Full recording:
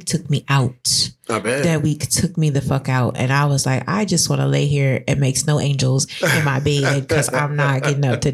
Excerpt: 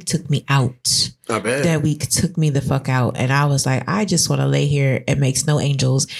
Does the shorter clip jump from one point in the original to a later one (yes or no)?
no